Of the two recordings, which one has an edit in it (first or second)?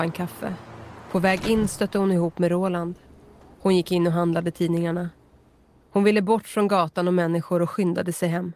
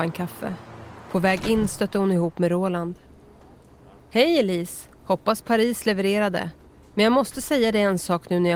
first